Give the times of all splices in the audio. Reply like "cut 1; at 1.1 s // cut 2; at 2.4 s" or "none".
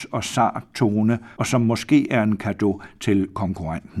cut 1; at 1.4 s